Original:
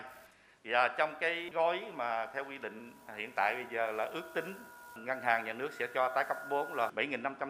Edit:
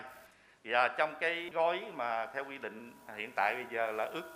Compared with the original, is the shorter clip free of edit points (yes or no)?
yes